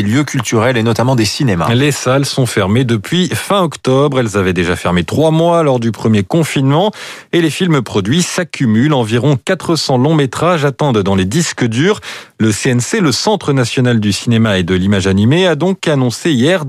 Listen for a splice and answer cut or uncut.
uncut